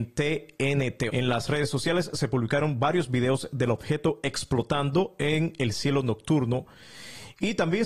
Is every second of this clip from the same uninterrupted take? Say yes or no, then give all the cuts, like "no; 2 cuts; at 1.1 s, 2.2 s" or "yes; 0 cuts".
no; 1 cut; at 1.1 s